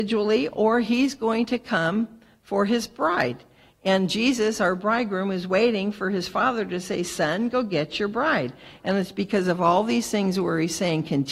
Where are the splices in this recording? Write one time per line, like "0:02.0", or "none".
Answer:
0:08.8